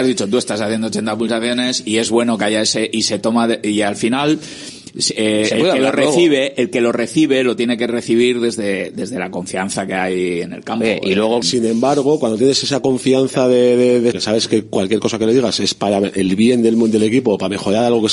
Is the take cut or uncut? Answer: cut